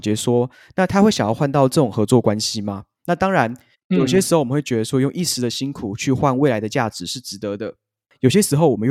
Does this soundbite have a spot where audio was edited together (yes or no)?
no